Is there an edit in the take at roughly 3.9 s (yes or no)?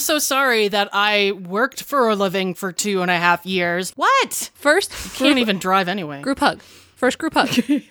yes